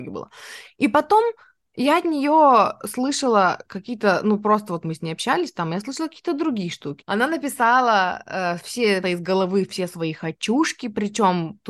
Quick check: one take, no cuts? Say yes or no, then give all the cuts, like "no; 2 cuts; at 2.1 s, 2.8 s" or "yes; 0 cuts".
no; 2 cuts; at 7.0 s, 9.0 s